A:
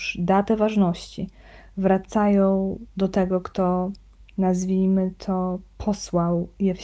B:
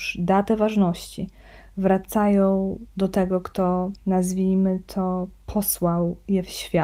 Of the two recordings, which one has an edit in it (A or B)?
B